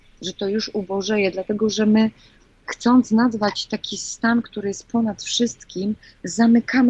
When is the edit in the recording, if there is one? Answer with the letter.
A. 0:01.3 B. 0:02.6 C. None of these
C